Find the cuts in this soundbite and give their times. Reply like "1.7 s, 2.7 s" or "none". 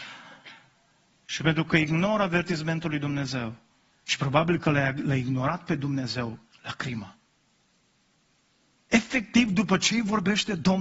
3.9 s, 6.5 s